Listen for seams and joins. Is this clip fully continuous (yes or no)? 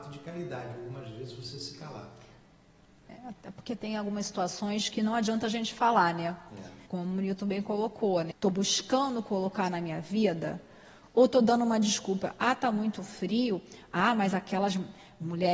no